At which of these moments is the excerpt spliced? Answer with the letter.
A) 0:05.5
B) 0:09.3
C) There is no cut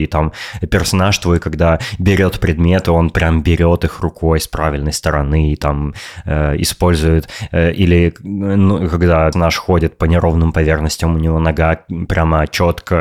B